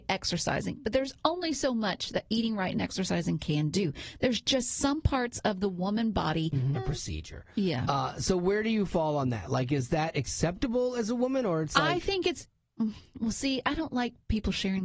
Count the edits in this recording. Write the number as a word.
one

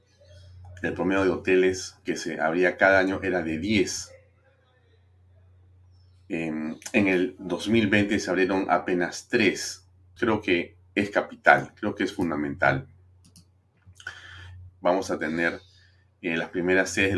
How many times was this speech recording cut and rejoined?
two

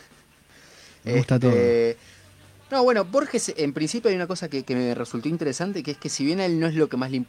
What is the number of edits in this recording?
zero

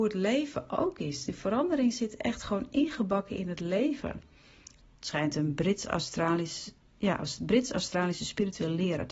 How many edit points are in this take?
one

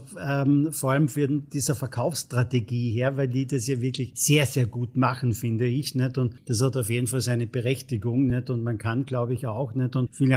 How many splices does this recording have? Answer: zero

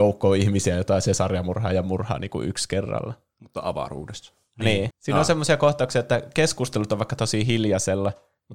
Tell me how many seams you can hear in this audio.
one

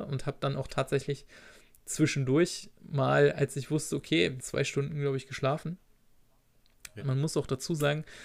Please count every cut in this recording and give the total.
two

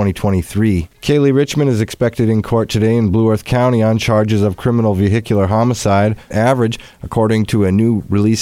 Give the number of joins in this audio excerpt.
two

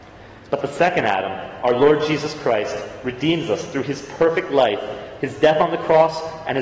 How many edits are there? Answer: zero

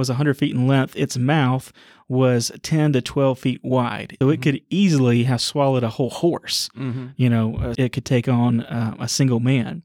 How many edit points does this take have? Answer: two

